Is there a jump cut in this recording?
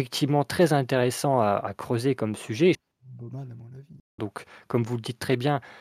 yes; 2 cuts; at 2.7 s, 4.2 s

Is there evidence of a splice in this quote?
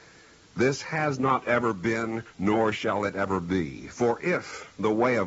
no; 0 cuts

